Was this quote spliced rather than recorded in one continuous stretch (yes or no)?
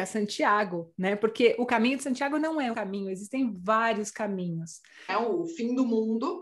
yes